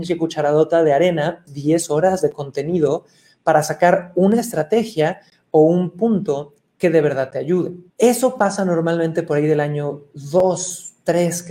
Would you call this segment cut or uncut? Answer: cut